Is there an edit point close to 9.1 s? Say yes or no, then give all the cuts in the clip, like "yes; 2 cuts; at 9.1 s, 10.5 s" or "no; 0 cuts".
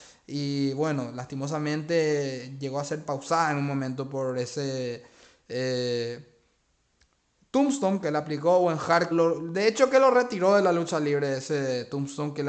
yes; 1 cut; at 9.1 s